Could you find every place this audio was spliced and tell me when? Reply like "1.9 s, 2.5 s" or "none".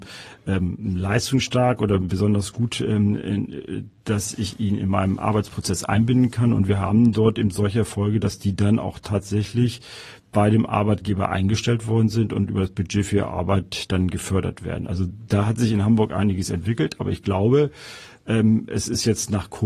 none